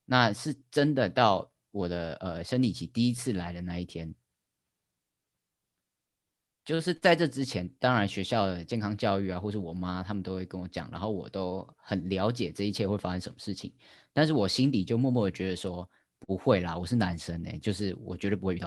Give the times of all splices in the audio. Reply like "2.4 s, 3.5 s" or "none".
none